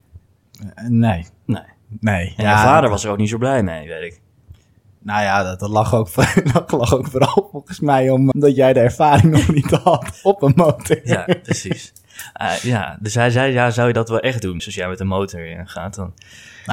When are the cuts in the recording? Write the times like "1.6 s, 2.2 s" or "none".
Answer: 8.3 s, 14.6 s